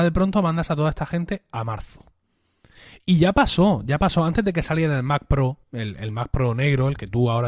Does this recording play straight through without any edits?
no; 1 cut; at 5.6 s

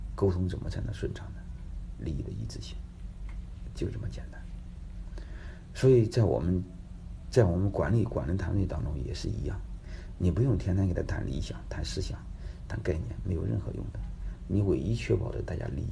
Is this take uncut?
yes; 0 cuts

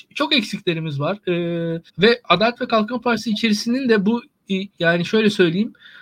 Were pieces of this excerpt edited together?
yes; 2 cuts; at 1.9 s, 4.7 s

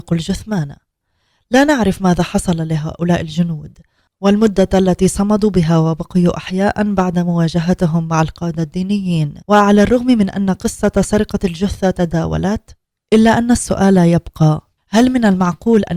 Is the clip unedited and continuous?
no; 1 cut; at 9.4 s

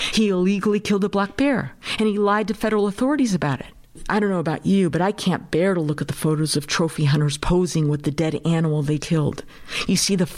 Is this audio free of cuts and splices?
no; 1 cut; at 9.0 s

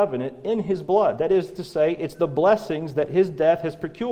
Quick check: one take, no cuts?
yes; 0 cuts

